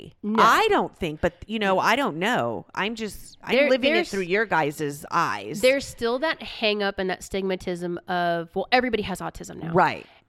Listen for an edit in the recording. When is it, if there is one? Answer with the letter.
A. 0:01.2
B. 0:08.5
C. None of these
C